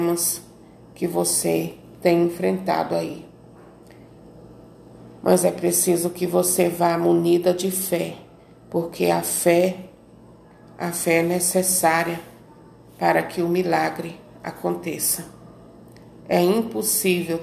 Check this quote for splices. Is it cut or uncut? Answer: cut